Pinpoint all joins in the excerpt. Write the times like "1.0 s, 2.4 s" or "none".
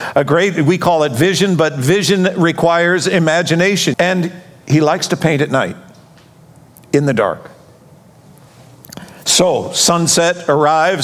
3.9 s